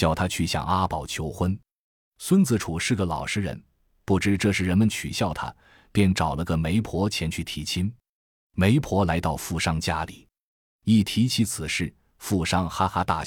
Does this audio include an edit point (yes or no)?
no